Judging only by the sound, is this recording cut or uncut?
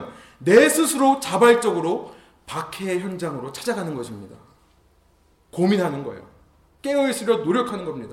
uncut